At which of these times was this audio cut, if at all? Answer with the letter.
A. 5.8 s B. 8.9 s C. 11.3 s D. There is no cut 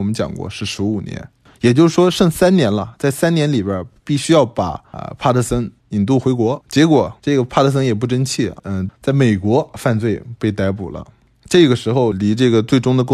B